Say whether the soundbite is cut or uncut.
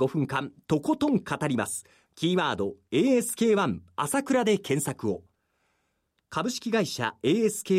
cut